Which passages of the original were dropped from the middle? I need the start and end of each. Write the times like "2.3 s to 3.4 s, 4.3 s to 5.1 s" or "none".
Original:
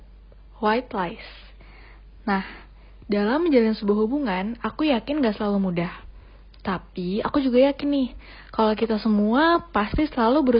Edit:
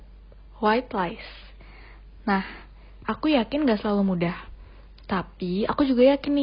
3.0 s to 4.6 s